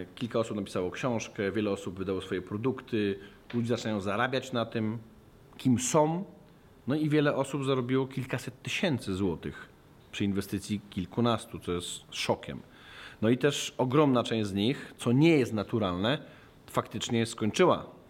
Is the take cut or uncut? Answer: uncut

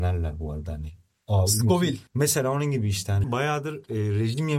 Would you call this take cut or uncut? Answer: cut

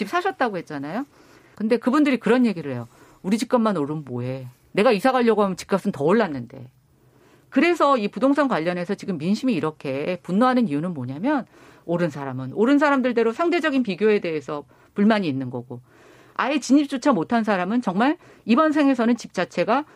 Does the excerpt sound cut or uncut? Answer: cut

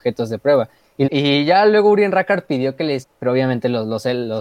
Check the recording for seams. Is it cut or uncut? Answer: cut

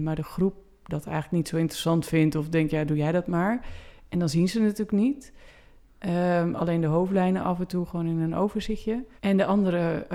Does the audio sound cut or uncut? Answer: cut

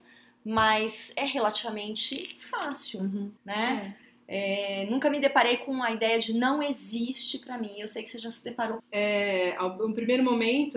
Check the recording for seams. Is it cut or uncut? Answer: cut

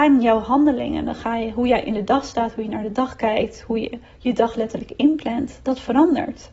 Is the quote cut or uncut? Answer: uncut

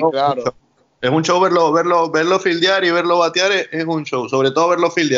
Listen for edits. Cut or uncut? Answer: uncut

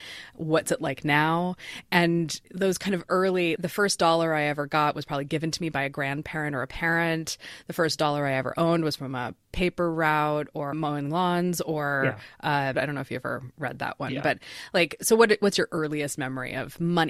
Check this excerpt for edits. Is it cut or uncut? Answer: cut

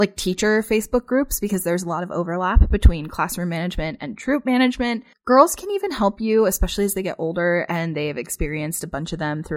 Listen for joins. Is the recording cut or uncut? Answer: cut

